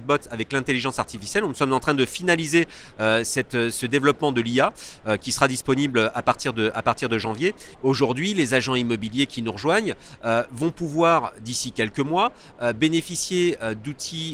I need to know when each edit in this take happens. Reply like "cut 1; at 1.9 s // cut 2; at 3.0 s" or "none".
cut 1; at 7.7 s